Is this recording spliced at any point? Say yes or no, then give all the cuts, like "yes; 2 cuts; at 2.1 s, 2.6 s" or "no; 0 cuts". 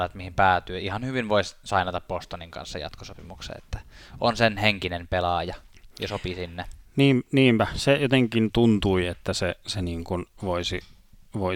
no; 0 cuts